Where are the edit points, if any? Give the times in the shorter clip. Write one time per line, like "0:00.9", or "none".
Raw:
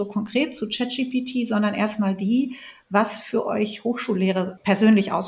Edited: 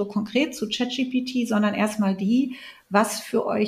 none